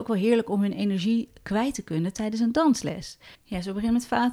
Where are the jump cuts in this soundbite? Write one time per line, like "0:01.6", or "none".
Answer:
0:03.3